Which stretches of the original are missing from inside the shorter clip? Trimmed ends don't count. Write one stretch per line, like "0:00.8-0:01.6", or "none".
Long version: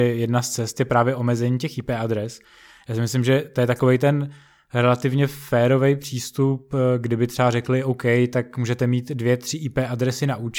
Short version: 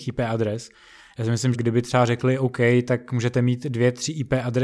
0:03.2-0:07.0